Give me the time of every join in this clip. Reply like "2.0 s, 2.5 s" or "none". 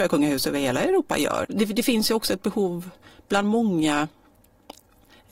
1.4 s